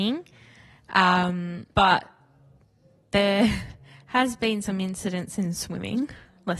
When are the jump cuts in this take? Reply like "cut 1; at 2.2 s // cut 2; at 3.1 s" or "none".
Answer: cut 1; at 1.7 s